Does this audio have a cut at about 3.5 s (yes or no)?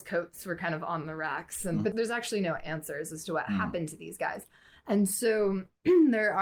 no